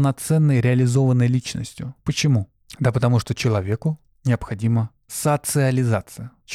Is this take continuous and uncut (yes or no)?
yes